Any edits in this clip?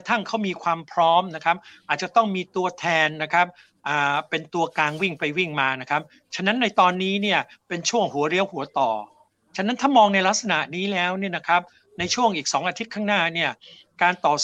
no; 0 cuts

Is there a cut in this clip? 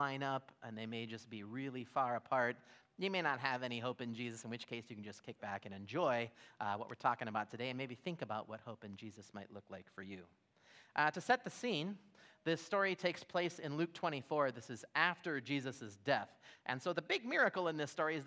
no; 0 cuts

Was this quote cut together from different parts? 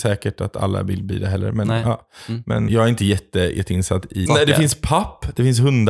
yes; 2 cuts; at 2.7 s, 4.3 s

